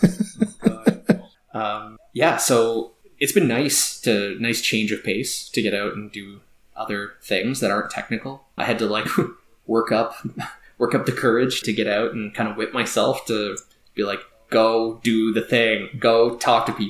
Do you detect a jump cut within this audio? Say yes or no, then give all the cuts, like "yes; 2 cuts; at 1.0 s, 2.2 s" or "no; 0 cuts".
yes; 2 cuts; at 8.6 s, 11.6 s